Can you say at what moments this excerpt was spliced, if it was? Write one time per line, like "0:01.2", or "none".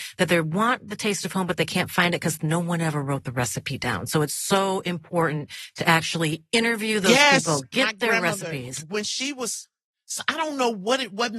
none

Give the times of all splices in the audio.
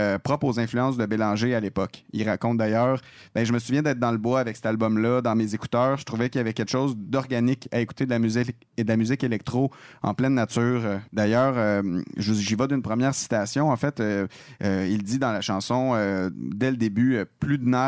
0:11.1

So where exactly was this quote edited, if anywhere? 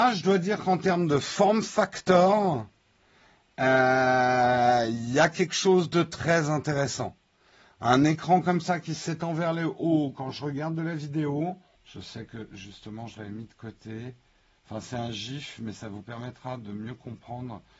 0:11.8

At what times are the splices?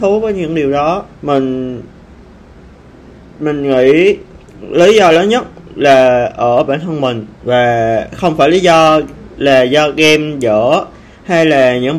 0:01.1
0:07.3

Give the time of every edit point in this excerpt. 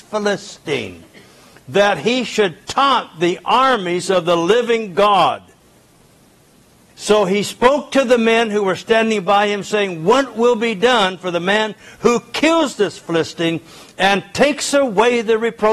0:06.9

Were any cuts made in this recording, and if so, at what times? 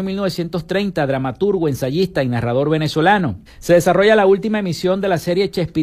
0:03.5

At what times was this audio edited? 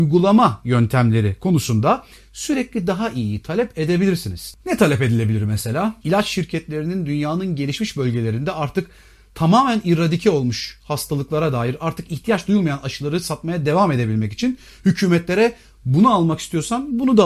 0:04.6
0:06.0

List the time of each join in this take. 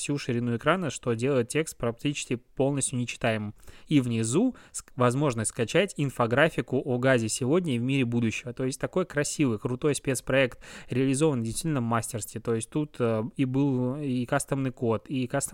none

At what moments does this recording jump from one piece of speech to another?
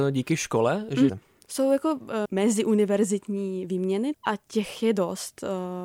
0:01.1
0:02.3
0:04.1

